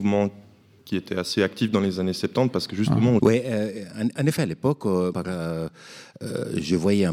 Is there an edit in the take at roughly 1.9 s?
no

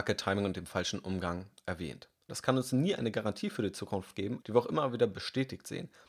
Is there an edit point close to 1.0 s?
no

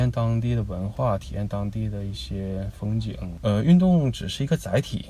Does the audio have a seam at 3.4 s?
no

